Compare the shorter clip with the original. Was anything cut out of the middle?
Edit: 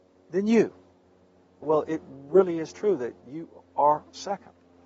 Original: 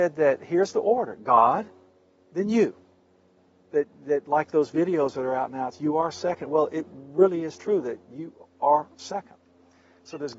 yes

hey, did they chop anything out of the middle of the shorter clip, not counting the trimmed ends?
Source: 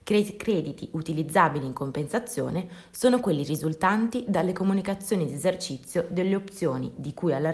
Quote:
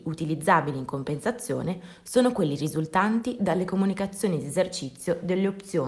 no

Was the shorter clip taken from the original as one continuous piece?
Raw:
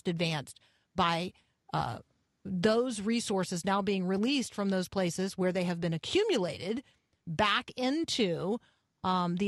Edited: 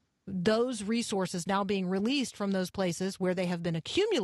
yes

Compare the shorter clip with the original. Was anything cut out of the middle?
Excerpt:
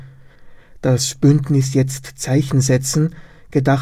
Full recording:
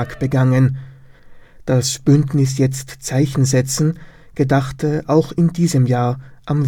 no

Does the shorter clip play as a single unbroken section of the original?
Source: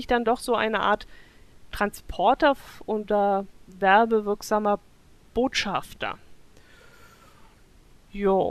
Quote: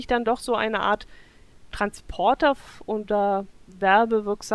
yes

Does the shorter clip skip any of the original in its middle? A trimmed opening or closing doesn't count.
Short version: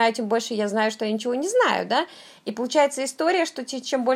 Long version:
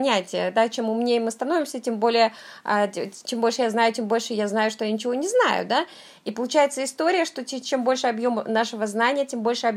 no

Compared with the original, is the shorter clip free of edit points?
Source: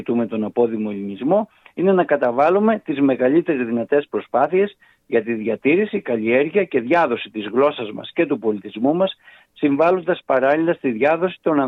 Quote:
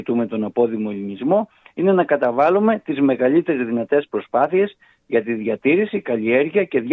yes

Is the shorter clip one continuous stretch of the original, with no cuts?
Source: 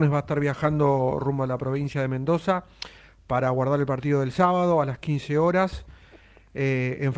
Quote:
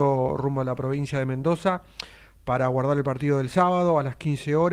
yes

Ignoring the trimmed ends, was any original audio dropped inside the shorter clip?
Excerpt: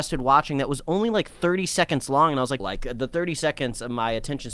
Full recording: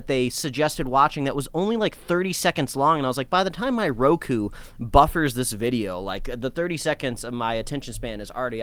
yes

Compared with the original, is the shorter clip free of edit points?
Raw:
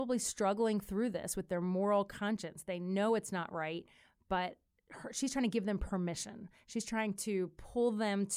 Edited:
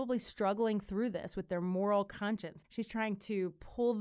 no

